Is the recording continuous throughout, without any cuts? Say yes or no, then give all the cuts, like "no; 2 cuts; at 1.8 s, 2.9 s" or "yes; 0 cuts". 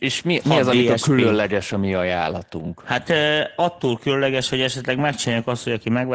yes; 0 cuts